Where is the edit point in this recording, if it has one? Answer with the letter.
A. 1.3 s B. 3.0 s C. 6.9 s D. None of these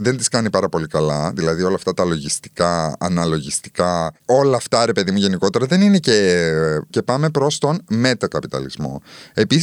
C